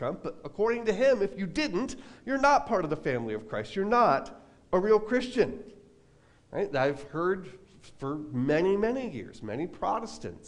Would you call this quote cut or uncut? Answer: uncut